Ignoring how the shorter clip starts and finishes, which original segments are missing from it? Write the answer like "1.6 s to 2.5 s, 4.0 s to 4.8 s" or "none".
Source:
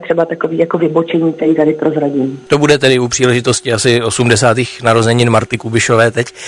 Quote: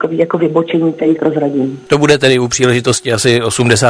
1.6 s to 1.8 s